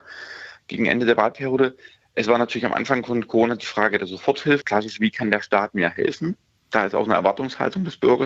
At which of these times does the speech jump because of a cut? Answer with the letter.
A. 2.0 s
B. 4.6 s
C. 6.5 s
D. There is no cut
B